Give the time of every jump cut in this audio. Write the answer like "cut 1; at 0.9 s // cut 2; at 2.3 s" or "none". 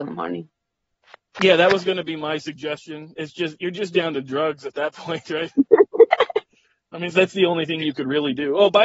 cut 1; at 7.1 s